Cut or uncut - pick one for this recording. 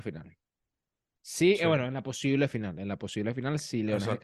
uncut